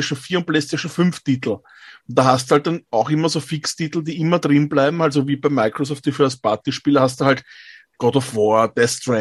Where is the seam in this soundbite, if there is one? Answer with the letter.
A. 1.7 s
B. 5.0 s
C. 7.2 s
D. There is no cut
D